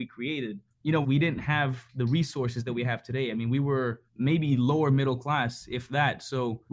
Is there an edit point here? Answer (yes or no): yes